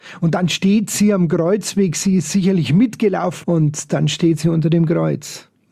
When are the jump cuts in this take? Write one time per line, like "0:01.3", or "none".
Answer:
0:03.4